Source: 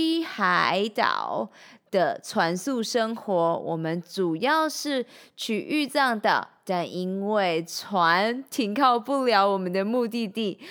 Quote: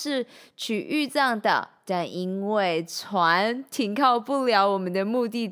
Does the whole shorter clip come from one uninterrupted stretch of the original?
yes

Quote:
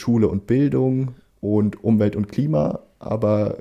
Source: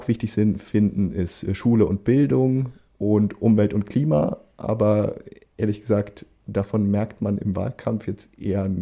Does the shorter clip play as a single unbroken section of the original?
yes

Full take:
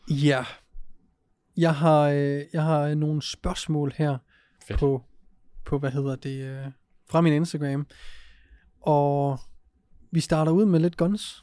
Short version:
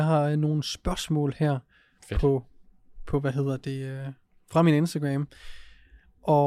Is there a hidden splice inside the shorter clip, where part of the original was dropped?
no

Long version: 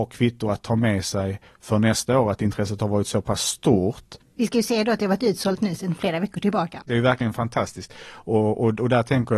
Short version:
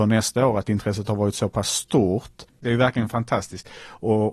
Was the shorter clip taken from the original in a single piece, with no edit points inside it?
no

